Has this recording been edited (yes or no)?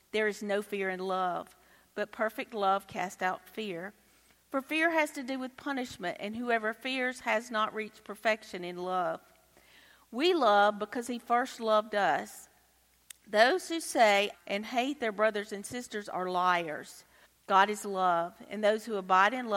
yes